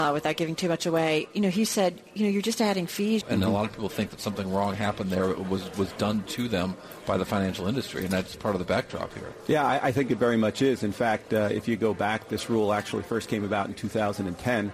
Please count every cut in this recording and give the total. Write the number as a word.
one